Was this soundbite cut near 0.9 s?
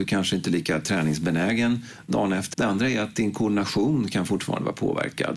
no; 1 cut; at 2.5 s

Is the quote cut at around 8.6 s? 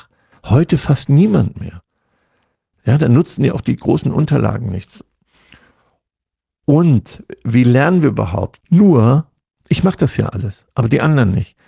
yes; 1 cut; at 8.6 s

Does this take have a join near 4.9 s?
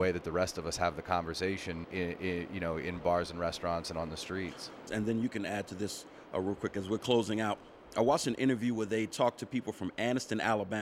yes; 2 cuts; at 1.8 s, 4.9 s

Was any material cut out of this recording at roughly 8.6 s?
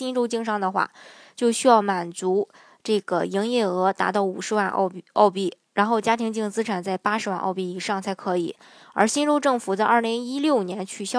no; 0 cuts

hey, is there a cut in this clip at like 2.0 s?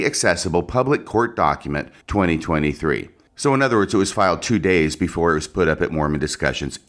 yes; 1 cut; at 2.0 s

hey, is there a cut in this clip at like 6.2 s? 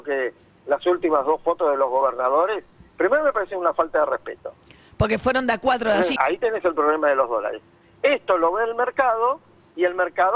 yes; 1 cut; at 6.2 s

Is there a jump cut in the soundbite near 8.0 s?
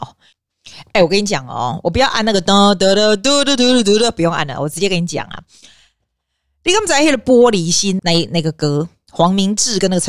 yes; 1 cut; at 8.0 s

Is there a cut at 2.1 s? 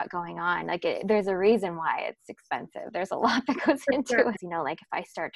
no; 1 cut; at 4.4 s

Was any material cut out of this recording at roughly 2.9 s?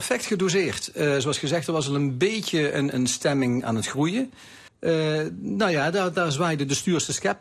yes; 2 cuts; at 2.9 s, 4.7 s

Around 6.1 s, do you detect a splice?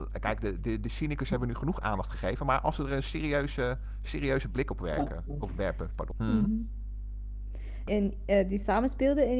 yes; 2 cuts; at 6.1 s, 7.9 s

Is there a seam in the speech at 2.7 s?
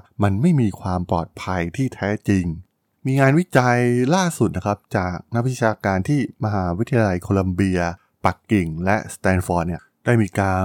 no; 0 cuts

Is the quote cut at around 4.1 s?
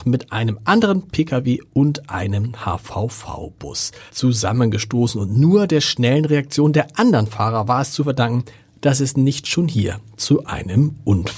yes; 1 cut; at 4.1 s

